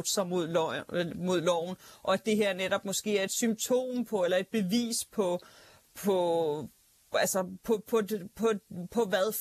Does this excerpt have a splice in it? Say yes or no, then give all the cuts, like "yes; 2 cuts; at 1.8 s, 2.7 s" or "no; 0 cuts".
no; 0 cuts